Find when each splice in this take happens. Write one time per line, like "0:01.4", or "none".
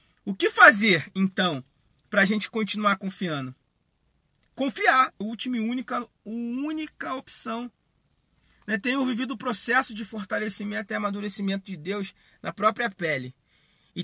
0:05.2